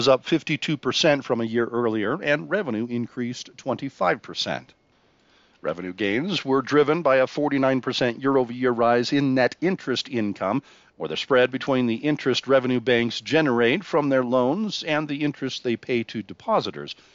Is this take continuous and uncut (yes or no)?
yes